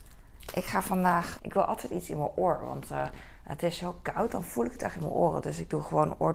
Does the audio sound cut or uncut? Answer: cut